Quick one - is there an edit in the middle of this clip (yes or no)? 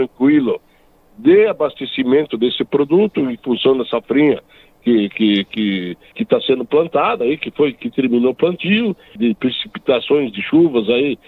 yes